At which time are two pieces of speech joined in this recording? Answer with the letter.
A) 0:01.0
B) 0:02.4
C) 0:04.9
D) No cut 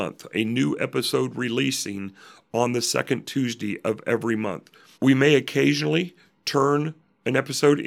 C